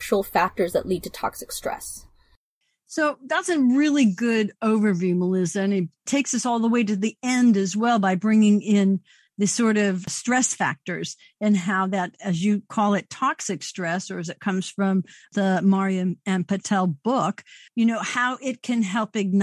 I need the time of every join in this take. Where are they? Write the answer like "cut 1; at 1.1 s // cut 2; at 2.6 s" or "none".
cut 1; at 17.7 s